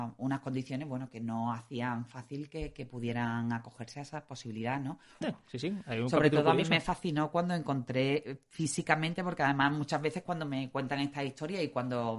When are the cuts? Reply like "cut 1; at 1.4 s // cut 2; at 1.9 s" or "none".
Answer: cut 1; at 5.2 s